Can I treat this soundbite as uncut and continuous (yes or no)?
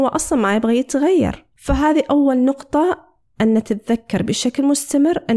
no